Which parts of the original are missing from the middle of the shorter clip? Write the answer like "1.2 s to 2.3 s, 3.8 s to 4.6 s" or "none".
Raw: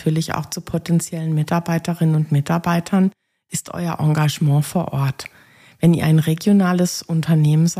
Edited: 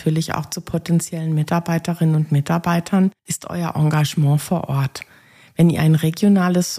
3.2 s to 3.4 s